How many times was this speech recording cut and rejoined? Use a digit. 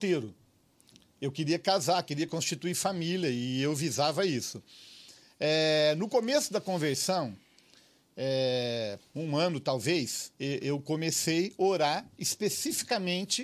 2